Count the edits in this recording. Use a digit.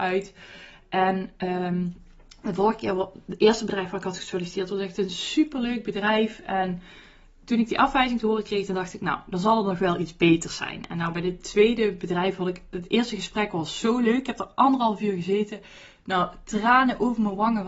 0